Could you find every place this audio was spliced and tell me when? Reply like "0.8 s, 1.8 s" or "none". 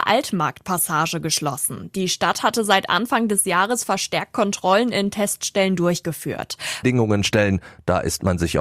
6.8 s